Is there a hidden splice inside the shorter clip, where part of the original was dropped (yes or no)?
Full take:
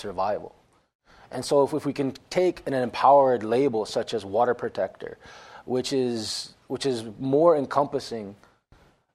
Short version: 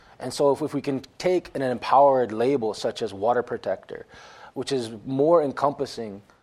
yes